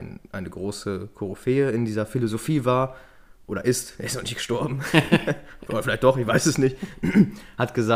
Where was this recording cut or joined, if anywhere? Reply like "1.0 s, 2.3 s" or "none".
none